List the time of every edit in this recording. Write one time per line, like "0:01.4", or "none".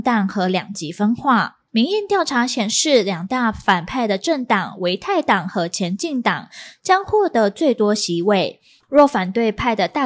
0:01.7
0:08.8